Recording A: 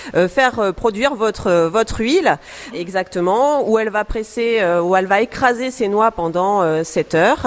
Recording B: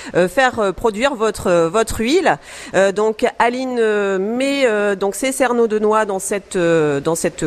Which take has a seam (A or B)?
A